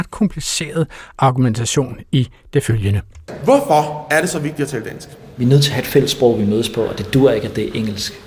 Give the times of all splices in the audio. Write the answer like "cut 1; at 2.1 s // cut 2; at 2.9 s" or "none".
none

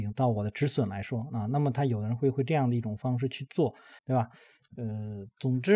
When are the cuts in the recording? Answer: cut 1; at 4.0 s

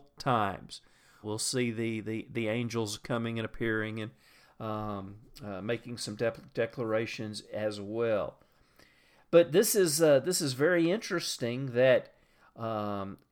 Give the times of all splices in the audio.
cut 1; at 1.2 s

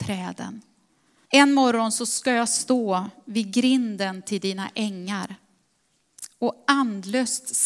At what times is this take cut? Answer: cut 1; at 1.2 s

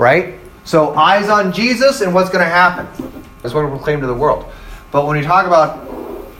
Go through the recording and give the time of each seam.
cut 1; at 3.4 s

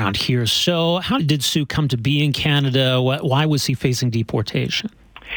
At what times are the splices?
cut 1; at 1.2 s

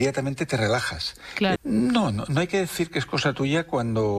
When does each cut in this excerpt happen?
cut 1; at 1.6 s

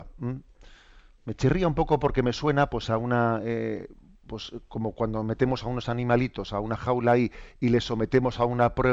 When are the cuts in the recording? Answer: none

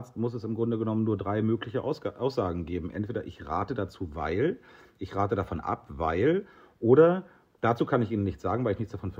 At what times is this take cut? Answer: none

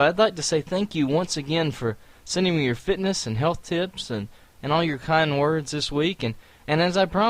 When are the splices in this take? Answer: none

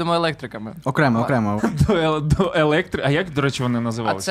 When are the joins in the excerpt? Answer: cut 1; at 1.6 s

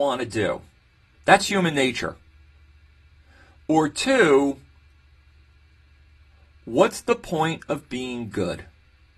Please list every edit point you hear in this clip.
cut 1; at 1.2 s

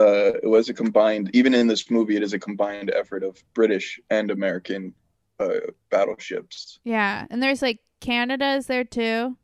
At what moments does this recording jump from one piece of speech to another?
none

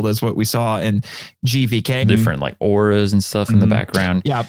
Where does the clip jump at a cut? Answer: cut 1; at 2.0 s

